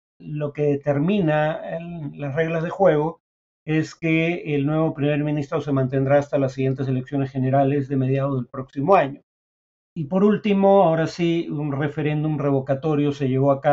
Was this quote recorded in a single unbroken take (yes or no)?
yes